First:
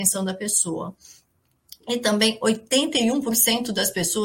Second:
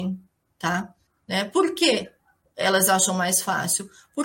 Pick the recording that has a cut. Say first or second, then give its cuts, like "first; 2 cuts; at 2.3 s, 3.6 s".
second; 1 cut; at 1.1 s